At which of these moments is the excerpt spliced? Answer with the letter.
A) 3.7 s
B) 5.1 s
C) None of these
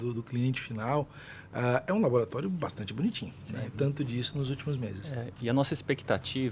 A